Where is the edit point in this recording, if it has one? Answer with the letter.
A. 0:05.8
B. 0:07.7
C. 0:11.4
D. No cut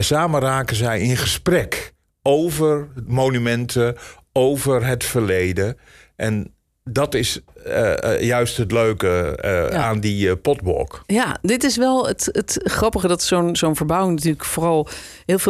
D